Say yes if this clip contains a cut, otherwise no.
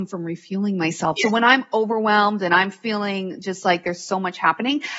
yes